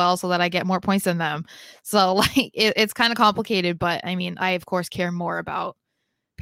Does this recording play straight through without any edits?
yes; 0 cuts

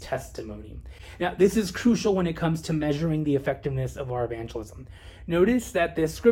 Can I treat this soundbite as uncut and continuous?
yes; 0 cuts

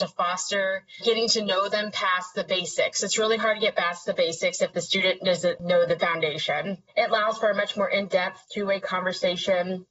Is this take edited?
no; 0 cuts

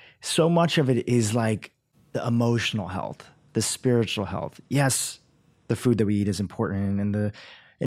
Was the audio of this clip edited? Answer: no; 0 cuts

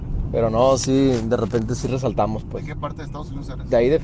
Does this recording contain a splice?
no; 0 cuts

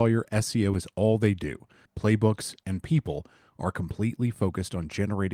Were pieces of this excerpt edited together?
yes; 1 cut; at 1.9 s

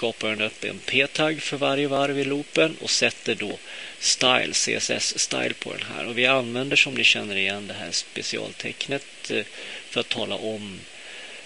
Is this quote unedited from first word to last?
yes; 0 cuts

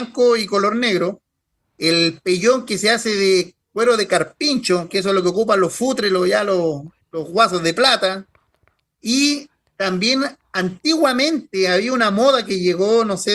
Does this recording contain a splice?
no; 0 cuts

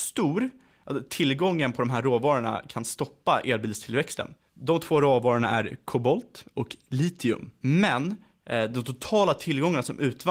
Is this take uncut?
no; 1 cut; at 7.6 s

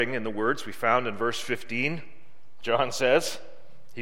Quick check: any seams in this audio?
no; 0 cuts

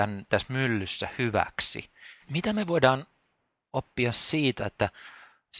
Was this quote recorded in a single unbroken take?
no; 2 cuts; at 2.2 s, 4.6 s

